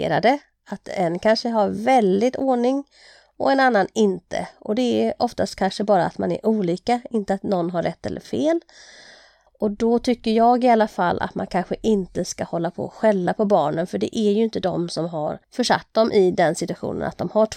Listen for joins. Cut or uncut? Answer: cut